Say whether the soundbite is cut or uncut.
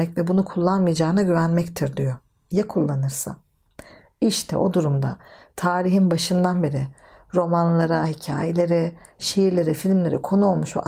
uncut